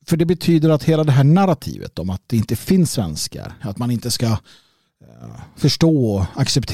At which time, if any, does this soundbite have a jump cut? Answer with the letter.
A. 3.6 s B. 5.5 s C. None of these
A